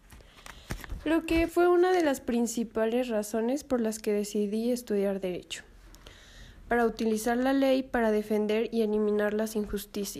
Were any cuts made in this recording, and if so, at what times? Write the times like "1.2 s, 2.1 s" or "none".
1.5 s